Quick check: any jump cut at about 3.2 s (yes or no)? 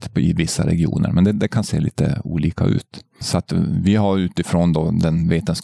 yes